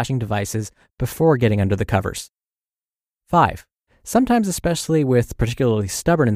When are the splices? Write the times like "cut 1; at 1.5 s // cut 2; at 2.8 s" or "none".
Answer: cut 1; at 3.9 s